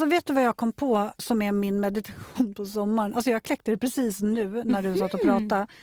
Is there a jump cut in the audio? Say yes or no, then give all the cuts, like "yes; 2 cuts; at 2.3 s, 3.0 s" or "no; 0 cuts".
yes; 1 cut; at 1.2 s